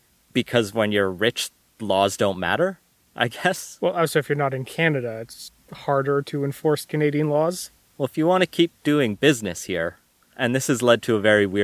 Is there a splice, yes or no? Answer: no